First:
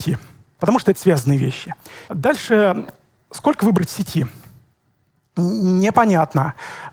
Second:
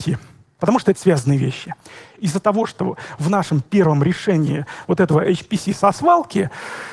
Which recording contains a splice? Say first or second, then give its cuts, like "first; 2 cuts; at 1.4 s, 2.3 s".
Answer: first; 1 cut; at 2.1 s